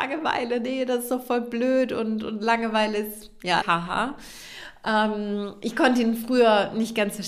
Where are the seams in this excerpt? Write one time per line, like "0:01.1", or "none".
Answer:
0:03.6